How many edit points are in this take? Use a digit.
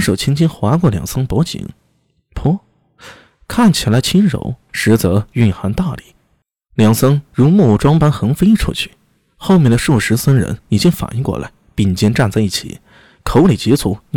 0